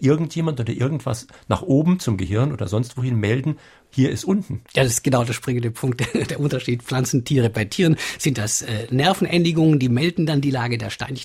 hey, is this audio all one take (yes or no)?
no